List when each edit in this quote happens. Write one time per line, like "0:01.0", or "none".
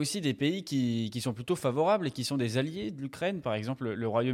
none